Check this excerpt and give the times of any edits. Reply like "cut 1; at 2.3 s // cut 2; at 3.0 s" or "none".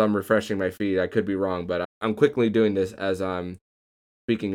cut 1; at 1.8 s